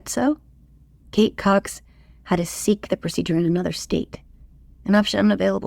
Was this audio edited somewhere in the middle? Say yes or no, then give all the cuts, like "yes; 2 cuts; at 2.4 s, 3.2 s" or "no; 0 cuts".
yes; 1 cut; at 1.0 s